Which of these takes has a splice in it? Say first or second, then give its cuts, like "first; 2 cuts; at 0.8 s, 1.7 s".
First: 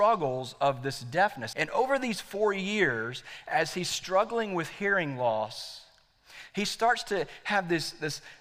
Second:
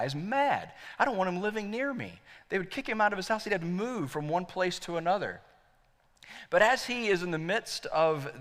first; 1 cut; at 1.5 s